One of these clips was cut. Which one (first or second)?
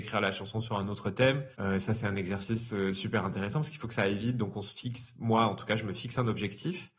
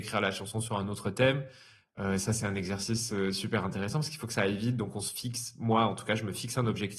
first